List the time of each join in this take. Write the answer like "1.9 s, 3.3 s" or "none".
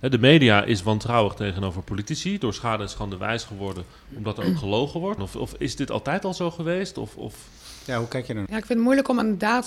5.2 s, 8.5 s